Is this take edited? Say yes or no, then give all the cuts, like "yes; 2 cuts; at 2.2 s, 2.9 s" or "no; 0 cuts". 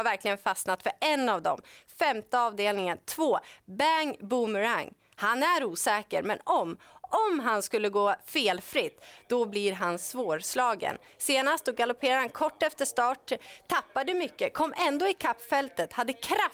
no; 0 cuts